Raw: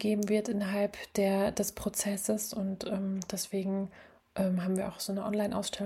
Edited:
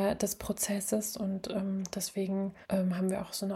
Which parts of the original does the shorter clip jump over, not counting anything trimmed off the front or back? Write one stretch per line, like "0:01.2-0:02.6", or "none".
0:04.0-0:04.3